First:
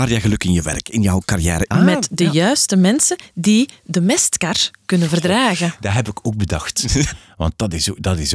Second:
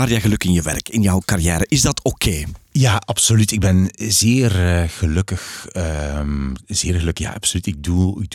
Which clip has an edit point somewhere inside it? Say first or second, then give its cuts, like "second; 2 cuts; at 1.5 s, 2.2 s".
first; 2 cuts; at 1.7 s, 7.1 s